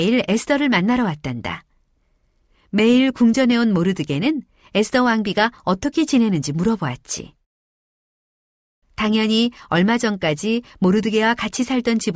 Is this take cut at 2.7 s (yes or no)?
no